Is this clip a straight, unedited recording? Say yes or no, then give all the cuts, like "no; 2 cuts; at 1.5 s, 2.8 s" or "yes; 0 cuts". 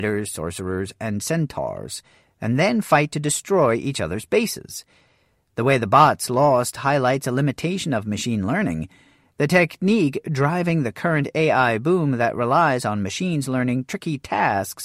yes; 0 cuts